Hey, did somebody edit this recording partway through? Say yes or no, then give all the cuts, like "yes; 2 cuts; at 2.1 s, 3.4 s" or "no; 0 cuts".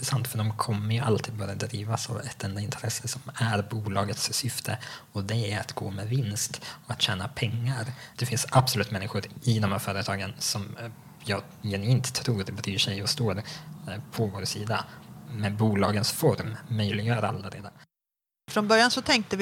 yes; 1 cut; at 8.1 s